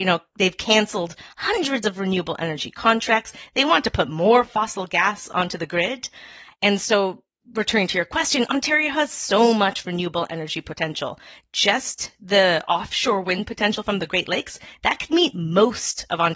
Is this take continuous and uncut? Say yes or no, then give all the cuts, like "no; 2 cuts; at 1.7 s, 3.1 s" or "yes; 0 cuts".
no; 1 cut; at 6.5 s